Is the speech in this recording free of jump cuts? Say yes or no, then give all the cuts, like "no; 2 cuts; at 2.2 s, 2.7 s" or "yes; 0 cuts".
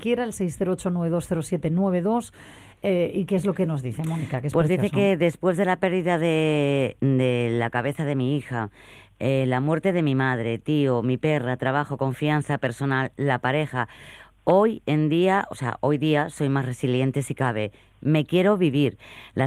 yes; 0 cuts